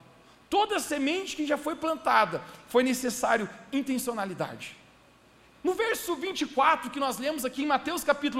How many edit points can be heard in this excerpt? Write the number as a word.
one